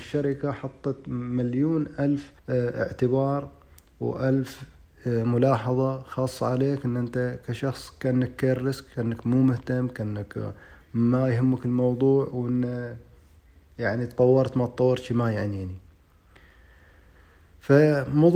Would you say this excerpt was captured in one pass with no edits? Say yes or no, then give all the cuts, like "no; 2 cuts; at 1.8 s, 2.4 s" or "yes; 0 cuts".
no; 1 cut; at 2.4 s